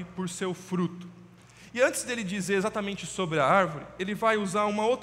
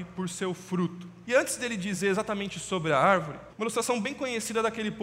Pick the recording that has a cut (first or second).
second